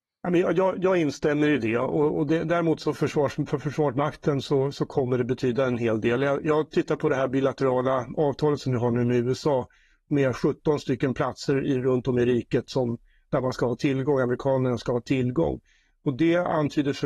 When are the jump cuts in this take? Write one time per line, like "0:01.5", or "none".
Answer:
none